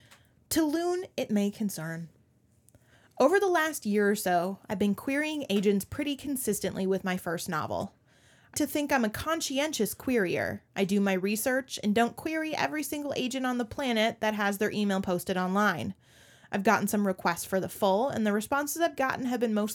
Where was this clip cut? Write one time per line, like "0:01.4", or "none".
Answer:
0:08.5